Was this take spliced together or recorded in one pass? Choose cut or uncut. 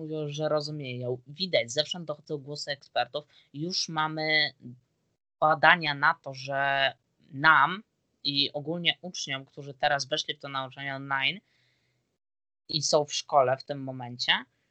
uncut